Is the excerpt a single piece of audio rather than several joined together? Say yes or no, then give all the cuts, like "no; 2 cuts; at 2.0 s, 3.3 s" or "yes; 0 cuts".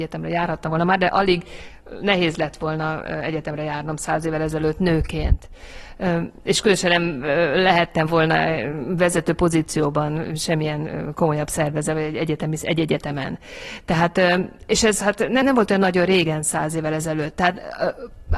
no; 1 cut; at 15.4 s